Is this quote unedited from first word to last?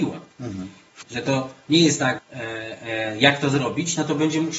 no; 2 cuts; at 1.0 s, 2.2 s

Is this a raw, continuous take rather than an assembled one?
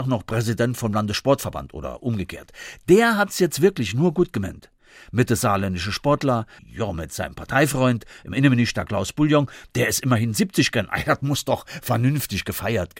no; 1 cut; at 6.6 s

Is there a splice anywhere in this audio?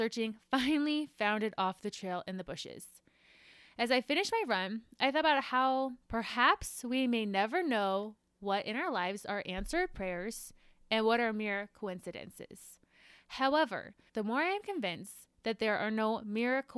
yes; 1 cut; at 14.1 s

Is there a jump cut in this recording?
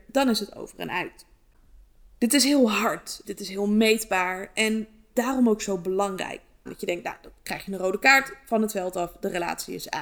yes; 2 cuts; at 3.2 s, 6.7 s

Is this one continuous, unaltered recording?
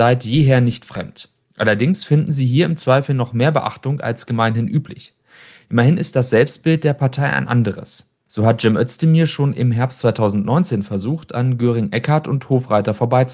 no; 1 cut; at 8.3 s

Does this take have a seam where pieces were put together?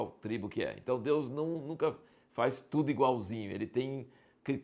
no; 0 cuts

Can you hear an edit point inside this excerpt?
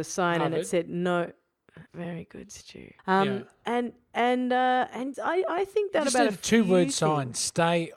yes; 3 cuts; at 1.9 s, 3.0 s, 5.1 s

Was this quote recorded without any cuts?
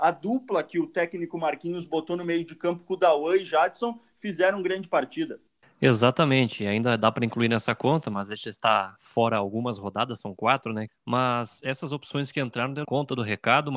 no; 2 cuts; at 10.9 s, 12.8 s

